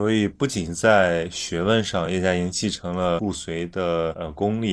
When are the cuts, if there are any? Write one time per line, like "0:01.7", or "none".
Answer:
none